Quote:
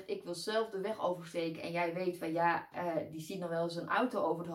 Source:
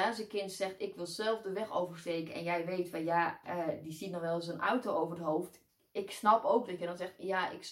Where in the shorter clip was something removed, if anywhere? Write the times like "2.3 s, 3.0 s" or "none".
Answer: none